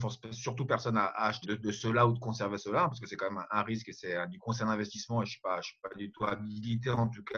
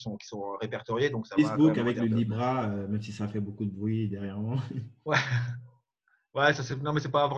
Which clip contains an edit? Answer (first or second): first